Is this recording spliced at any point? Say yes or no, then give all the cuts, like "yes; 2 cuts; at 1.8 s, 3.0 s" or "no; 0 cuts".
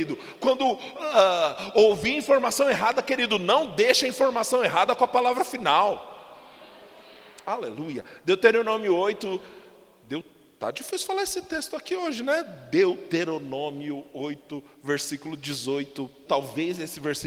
yes; 1 cut; at 16.3 s